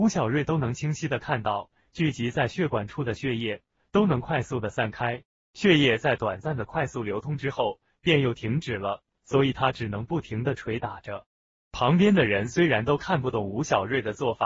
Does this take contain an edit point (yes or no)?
no